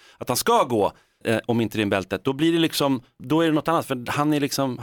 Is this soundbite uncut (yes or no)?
no